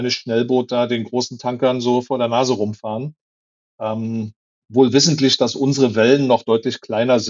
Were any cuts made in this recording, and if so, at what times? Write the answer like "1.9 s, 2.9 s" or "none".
none